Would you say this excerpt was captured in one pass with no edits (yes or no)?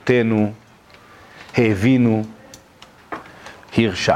yes